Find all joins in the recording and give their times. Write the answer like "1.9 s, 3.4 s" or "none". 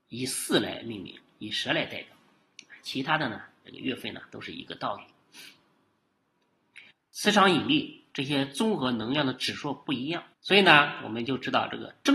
6.9 s, 10.3 s